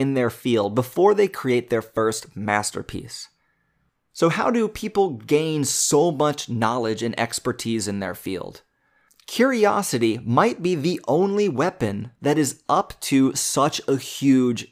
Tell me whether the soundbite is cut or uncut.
uncut